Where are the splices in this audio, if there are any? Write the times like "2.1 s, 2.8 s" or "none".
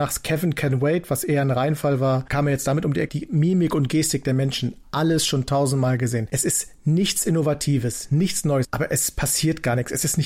3.1 s, 8.6 s